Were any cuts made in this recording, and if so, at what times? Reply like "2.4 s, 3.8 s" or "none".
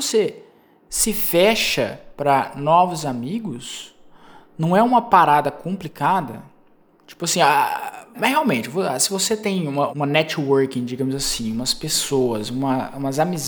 8.1 s, 9.9 s